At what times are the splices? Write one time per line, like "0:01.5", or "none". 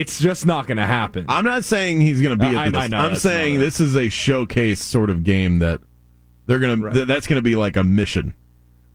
0:02.7